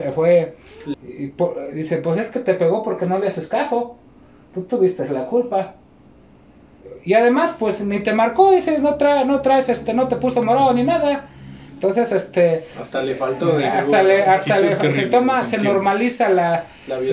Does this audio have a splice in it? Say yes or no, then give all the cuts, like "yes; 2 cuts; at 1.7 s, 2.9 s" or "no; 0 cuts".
yes; 1 cut; at 0.9 s